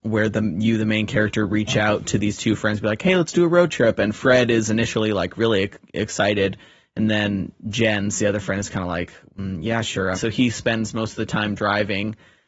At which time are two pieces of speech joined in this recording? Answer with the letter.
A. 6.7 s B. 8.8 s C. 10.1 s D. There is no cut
C